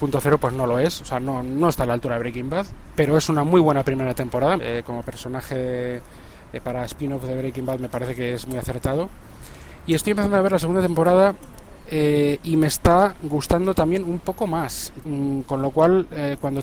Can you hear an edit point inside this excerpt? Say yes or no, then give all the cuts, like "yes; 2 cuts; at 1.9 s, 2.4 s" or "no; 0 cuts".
yes; 2 cuts; at 4.6 s, 15.0 s